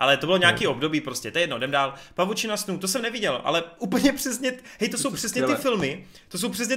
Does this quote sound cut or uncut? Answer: uncut